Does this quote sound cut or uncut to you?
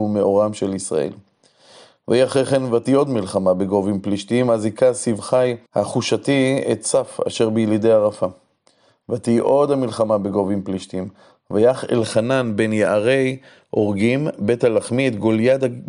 cut